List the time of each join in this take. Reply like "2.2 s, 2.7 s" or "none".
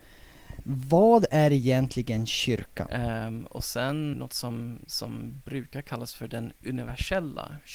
2.9 s, 4.1 s